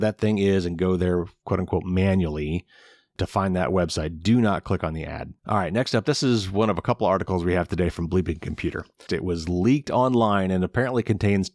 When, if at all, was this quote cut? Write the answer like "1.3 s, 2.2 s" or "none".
5.4 s, 9.1 s